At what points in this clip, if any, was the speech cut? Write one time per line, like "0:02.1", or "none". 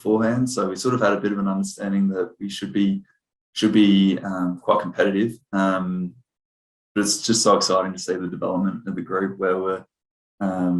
none